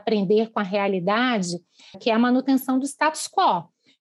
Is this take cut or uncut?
cut